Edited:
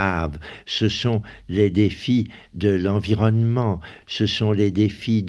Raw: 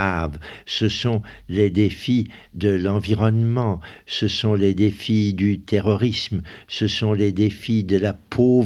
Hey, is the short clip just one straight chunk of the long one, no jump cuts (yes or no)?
no